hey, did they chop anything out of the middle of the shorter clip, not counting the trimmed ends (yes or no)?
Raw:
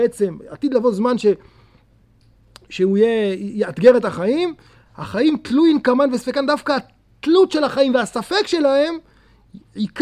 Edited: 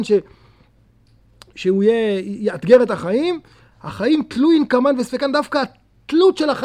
no